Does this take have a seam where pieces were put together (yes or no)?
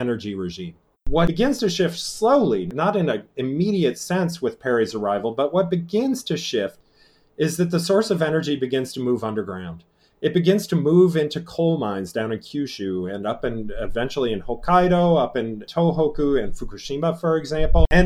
yes